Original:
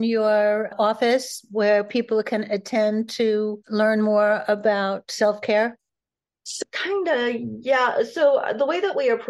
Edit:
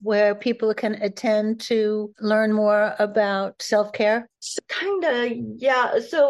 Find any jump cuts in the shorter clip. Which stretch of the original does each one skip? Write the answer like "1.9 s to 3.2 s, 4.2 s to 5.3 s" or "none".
5.8 s to 6.4 s